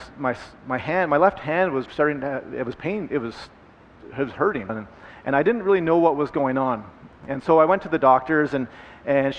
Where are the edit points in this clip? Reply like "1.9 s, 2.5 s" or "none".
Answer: 1.9 s, 4.7 s, 7.1 s